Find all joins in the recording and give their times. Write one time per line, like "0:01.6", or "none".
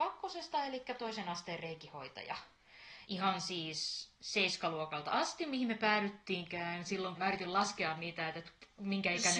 0:03.0
0:07.1